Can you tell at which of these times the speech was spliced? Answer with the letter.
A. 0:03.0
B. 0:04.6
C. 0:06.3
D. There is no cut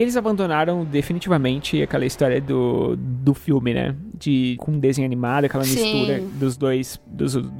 B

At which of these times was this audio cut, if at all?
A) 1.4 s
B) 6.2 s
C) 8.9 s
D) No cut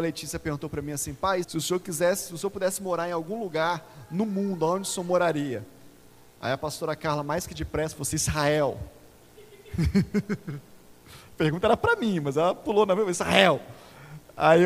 A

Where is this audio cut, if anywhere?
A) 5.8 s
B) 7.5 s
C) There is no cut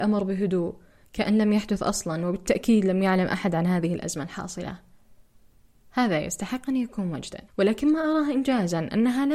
B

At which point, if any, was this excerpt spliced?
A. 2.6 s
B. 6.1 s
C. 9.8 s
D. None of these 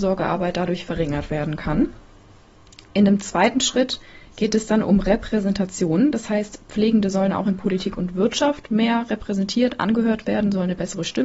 D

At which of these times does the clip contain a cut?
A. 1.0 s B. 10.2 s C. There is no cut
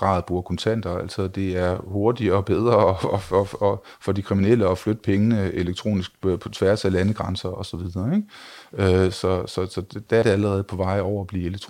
B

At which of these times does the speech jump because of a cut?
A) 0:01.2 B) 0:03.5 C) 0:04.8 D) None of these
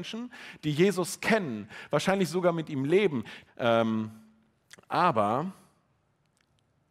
B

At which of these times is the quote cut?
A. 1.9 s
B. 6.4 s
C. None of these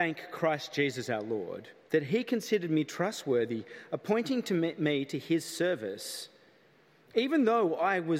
A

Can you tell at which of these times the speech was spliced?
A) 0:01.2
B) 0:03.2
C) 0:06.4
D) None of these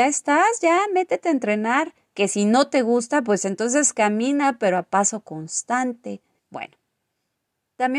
C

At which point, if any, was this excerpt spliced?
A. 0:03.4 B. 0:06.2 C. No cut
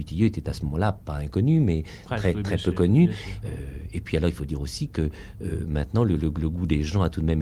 A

